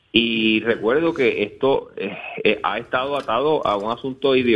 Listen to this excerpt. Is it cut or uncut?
uncut